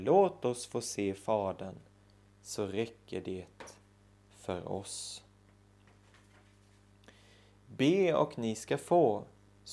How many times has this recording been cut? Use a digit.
0